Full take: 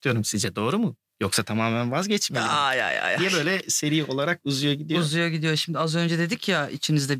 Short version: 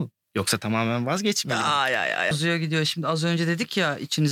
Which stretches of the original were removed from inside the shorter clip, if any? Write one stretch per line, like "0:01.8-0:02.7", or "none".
0:03.2-0:05.0